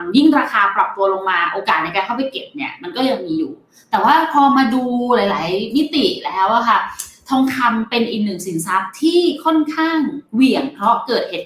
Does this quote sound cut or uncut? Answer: cut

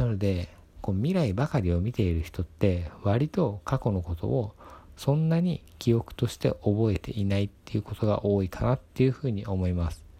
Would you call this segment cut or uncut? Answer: uncut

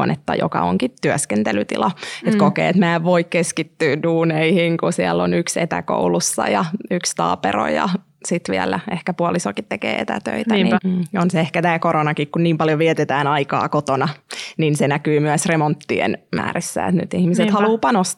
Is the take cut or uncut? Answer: cut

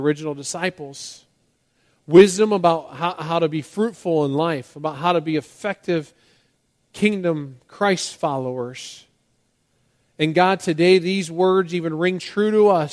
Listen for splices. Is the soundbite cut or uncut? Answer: uncut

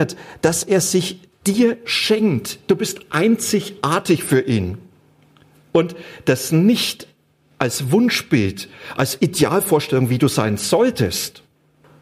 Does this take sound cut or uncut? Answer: uncut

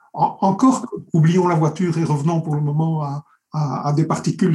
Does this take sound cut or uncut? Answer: uncut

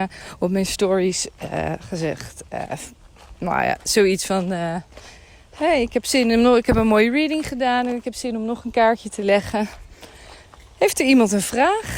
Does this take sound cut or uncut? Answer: uncut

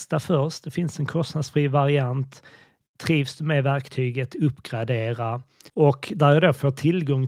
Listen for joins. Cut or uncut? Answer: cut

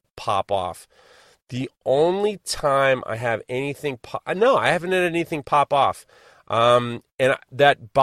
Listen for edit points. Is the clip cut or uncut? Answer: uncut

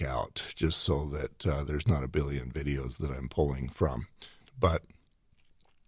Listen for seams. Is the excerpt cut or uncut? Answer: cut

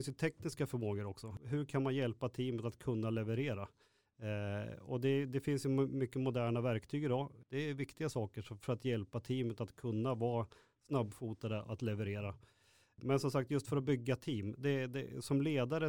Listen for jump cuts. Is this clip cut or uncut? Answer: cut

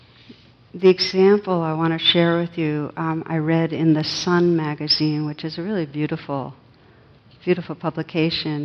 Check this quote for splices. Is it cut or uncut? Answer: uncut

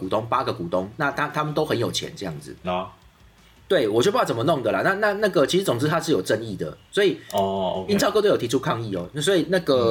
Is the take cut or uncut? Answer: cut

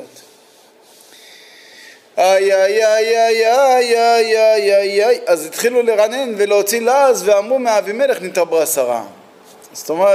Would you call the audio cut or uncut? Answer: uncut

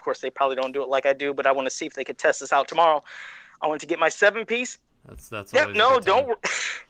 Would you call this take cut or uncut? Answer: cut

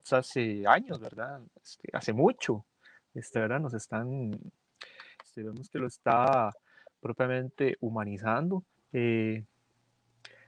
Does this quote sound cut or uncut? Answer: cut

